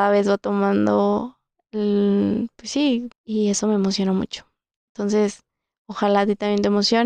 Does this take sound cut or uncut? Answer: cut